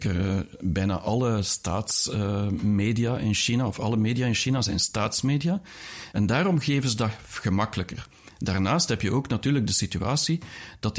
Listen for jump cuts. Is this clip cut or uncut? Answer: cut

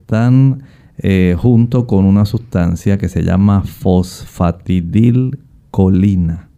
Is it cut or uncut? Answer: uncut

